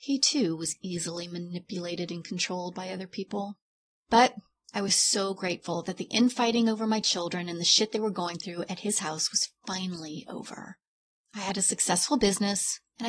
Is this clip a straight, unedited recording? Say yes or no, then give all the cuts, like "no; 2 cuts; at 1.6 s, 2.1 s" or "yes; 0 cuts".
yes; 0 cuts